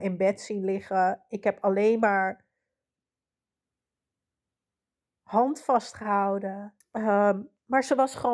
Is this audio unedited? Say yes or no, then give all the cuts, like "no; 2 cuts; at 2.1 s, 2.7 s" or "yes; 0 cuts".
no; 1 cut; at 6.8 s